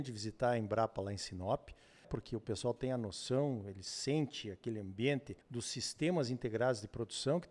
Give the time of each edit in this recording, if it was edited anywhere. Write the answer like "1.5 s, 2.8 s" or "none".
2.0 s, 5.4 s